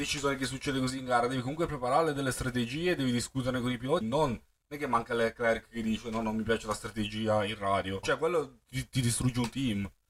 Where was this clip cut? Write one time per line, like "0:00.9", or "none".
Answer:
0:04.0
0:08.0